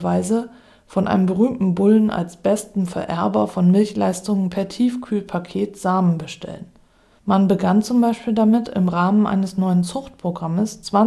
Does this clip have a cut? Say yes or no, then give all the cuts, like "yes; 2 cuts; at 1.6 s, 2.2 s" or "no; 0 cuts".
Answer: yes; 1 cut; at 7.2 s